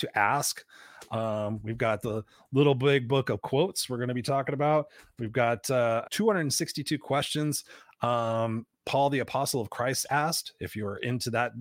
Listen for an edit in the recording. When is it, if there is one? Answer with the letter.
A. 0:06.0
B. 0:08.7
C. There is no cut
A